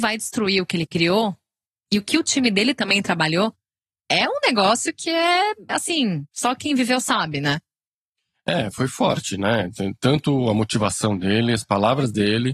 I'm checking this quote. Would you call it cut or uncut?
uncut